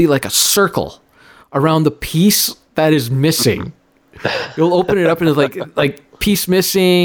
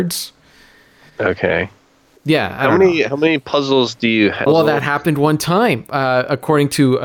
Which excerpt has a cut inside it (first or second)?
second